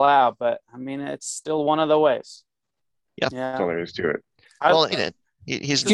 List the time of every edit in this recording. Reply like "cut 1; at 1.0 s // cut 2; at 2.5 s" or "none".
cut 1; at 3.1 s // cut 2; at 4.9 s